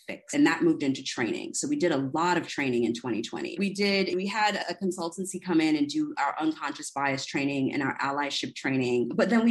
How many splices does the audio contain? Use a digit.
1